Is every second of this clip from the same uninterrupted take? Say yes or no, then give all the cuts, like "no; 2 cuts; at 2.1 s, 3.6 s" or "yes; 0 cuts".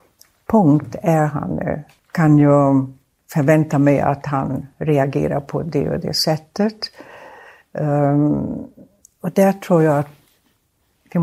no; 1 cut; at 2.0 s